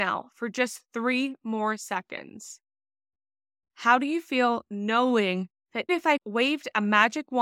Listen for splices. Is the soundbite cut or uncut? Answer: cut